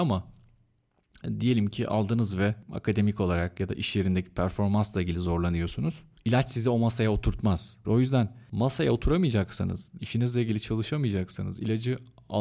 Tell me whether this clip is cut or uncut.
cut